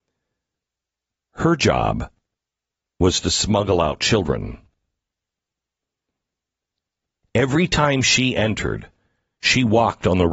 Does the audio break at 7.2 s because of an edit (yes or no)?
yes